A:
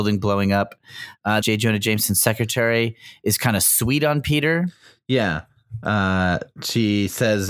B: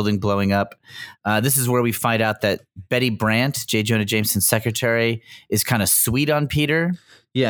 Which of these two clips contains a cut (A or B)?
A